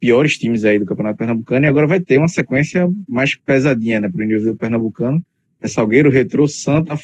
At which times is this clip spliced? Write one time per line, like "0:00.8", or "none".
none